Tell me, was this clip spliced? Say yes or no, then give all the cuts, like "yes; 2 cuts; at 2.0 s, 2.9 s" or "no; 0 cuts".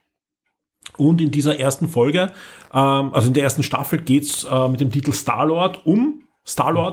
no; 0 cuts